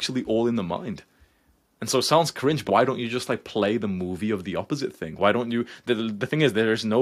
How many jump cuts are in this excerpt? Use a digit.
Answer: 1